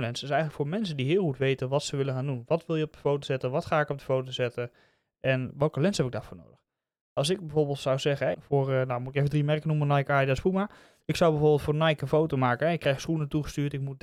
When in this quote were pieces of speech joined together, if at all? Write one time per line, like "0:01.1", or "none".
0:08.3